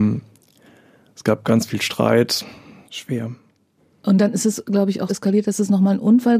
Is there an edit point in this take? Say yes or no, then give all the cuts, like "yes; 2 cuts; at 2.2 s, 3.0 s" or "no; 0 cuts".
yes; 2 cuts; at 2.8 s, 5.1 s